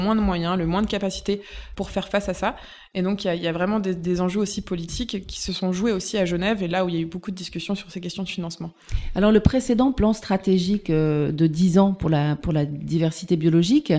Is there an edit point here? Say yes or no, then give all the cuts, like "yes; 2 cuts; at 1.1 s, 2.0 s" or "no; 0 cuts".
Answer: no; 0 cuts